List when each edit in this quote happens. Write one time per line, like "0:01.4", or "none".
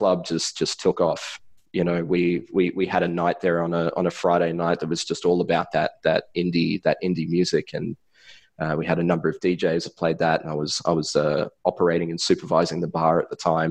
none